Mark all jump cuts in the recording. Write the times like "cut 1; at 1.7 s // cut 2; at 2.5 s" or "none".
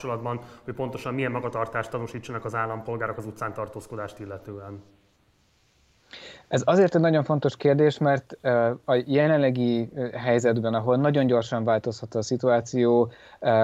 none